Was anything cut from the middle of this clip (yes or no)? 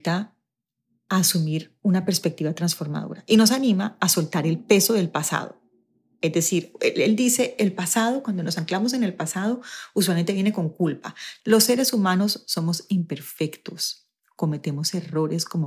yes